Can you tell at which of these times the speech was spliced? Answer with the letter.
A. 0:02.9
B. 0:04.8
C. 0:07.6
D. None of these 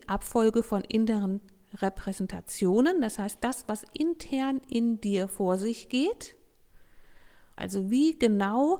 C